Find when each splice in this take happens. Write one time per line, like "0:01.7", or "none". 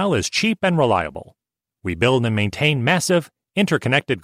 none